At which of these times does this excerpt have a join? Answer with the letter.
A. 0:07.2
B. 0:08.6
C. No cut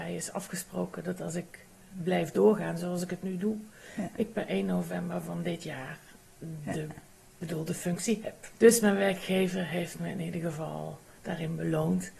B